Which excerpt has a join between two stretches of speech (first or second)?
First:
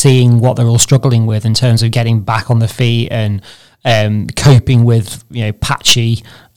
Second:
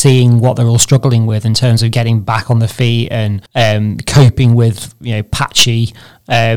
second